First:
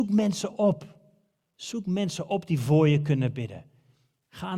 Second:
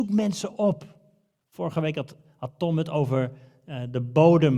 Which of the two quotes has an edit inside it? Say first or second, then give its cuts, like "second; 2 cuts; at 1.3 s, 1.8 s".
second; 1 cut; at 1.4 s